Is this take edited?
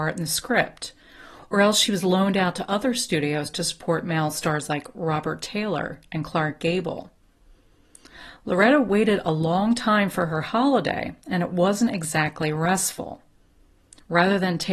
no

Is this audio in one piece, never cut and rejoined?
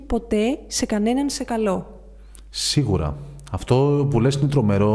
yes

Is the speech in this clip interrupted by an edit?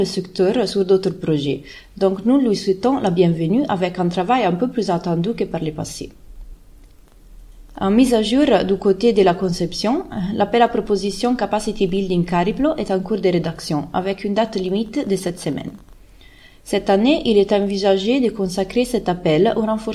no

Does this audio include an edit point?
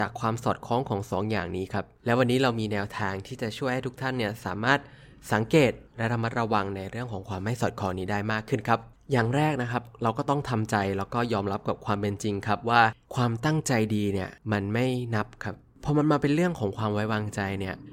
yes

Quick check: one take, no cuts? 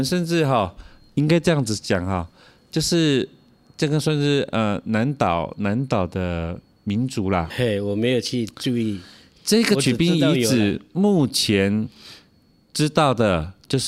no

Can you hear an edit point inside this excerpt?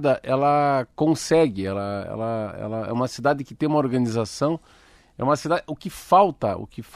no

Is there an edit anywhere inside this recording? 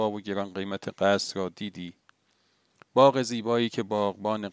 no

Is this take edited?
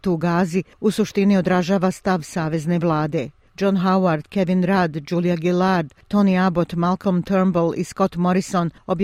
no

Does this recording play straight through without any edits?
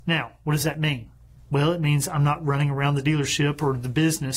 yes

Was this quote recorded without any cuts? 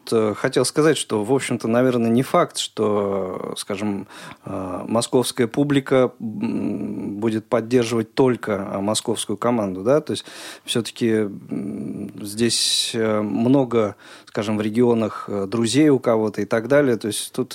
yes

